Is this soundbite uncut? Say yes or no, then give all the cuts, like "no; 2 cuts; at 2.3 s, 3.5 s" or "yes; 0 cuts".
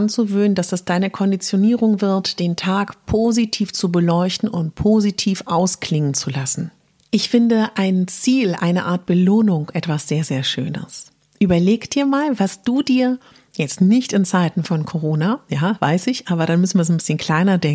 yes; 0 cuts